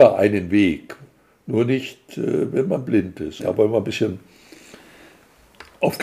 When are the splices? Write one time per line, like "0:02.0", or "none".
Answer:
0:03.4